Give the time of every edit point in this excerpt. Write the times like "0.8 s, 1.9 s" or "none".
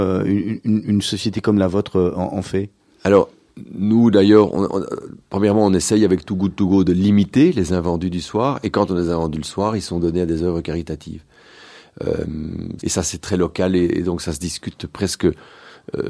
12.8 s